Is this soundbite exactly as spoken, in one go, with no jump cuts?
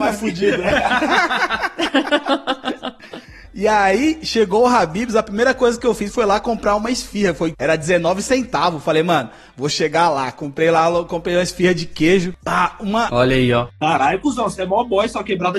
no; 2 cuts; at 7.5 s, 13.1 s

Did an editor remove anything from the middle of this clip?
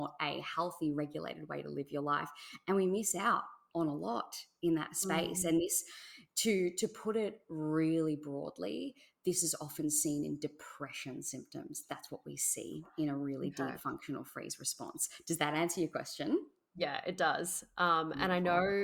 no; 0 cuts

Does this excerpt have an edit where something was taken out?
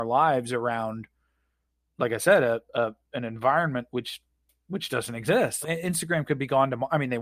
yes; 1 cut; at 5.6 s

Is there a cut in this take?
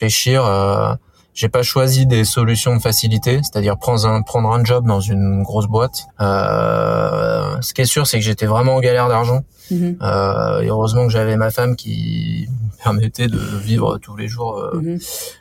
yes; 1 cut; at 6.1 s

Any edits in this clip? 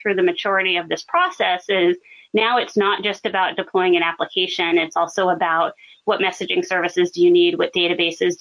no; 0 cuts

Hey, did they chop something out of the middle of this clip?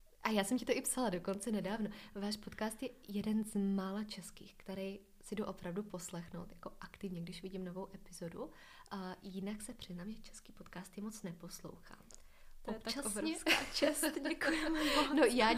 no; 0 cuts

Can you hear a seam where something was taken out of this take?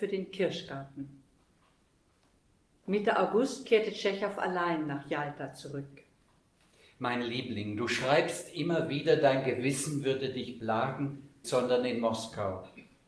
yes; 1 cut; at 11.4 s

